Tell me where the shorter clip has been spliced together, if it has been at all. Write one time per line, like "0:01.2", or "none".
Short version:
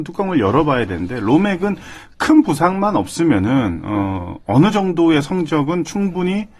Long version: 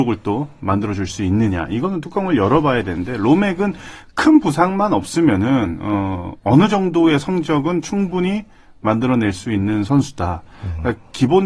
none